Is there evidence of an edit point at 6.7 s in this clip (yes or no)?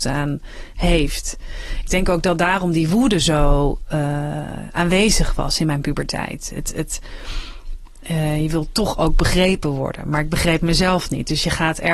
no